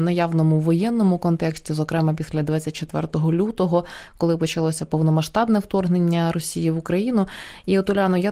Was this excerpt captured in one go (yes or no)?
yes